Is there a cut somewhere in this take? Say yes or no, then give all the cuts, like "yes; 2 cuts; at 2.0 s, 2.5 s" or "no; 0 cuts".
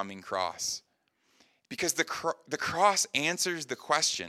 yes; 1 cut; at 1.6 s